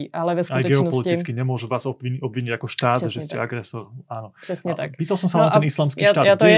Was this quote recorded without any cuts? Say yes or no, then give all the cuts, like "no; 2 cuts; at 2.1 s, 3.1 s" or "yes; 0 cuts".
yes; 0 cuts